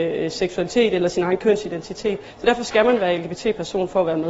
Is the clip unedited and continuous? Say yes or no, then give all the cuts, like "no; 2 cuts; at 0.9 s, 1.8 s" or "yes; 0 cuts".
yes; 0 cuts